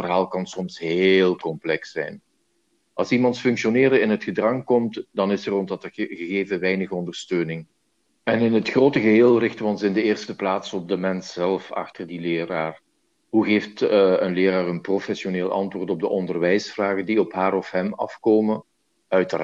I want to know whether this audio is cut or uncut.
cut